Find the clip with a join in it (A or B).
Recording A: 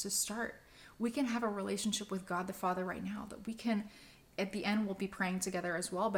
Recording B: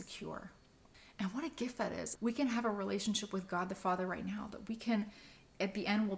B